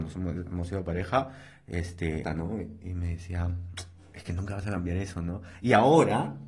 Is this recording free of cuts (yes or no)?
no